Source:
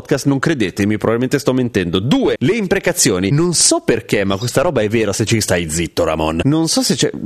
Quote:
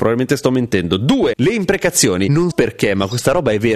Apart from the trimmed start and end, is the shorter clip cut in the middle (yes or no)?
yes